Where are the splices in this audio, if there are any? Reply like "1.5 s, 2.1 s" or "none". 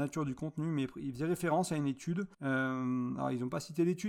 2.3 s